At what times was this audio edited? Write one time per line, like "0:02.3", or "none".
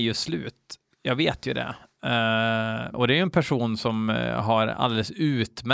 0:02.9